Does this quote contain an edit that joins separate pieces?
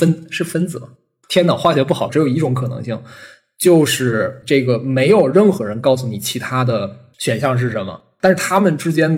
yes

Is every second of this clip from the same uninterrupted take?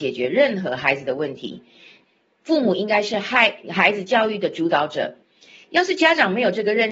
yes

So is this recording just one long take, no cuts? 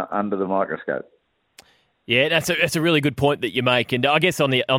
yes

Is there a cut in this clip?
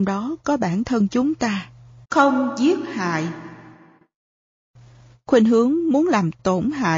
yes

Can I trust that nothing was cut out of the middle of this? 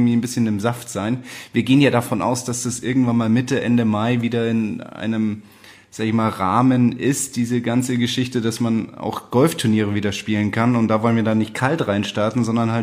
yes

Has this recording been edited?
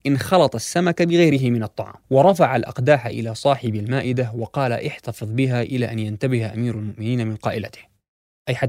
yes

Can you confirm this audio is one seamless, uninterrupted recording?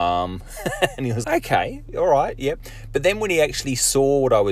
no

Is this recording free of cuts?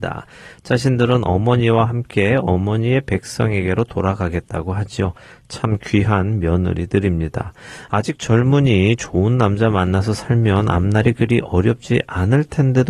yes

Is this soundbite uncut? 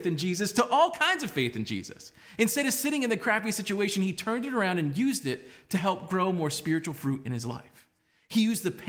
yes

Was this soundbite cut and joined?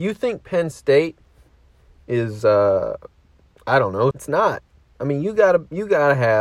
yes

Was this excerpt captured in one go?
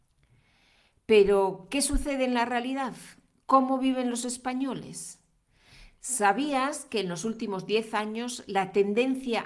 yes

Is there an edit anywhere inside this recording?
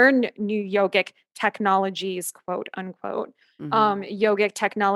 no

